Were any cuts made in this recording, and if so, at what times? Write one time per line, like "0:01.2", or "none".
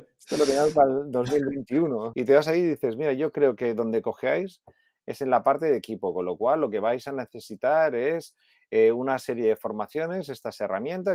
0:02.1